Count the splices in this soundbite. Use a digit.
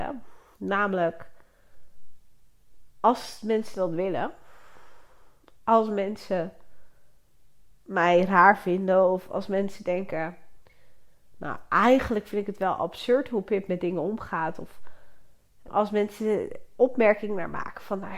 1